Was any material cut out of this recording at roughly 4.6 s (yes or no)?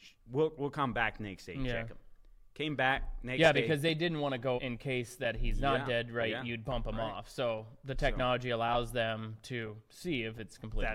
yes